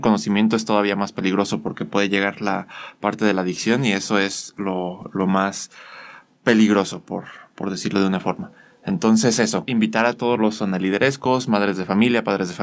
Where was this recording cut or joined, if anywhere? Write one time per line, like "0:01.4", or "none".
0:09.7

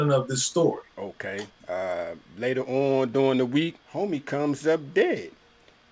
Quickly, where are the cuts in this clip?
0:01.5
0:03.8

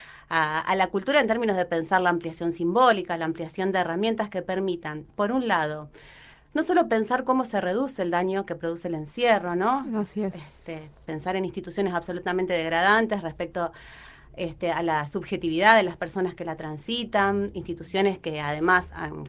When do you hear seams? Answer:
none

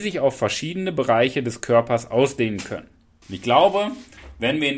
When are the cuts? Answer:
0:03.2

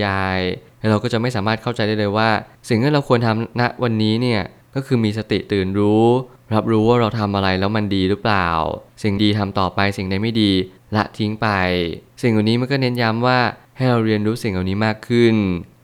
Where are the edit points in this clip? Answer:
0:09.2

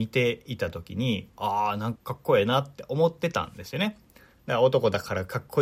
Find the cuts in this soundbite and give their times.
0:02.0

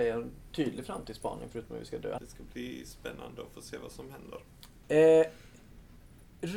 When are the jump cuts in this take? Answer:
0:02.2
0:04.8

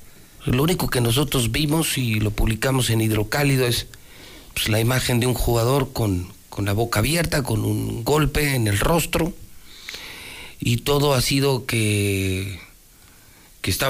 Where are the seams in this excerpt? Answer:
none

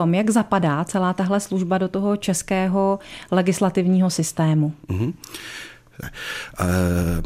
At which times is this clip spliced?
0:04.8
0:06.0

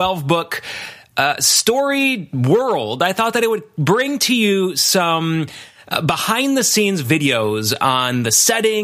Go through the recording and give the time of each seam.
none

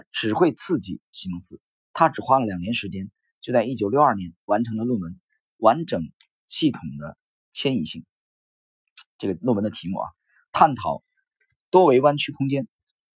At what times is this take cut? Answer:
none

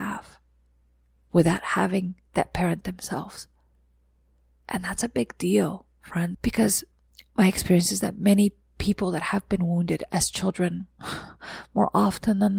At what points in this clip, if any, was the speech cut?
0:06.3

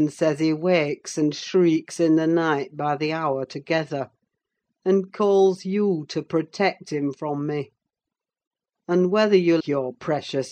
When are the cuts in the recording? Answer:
0:09.6

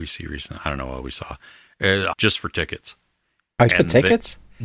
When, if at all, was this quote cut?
0:02.1
0:03.7

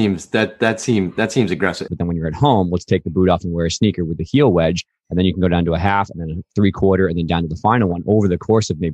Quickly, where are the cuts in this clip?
0:01.9

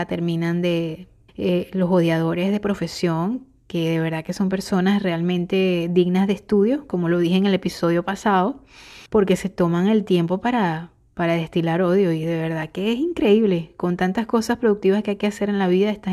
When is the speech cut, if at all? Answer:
0:01.3
0:09.1

